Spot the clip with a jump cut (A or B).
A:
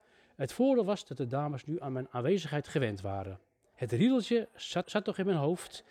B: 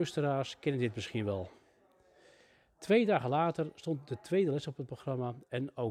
A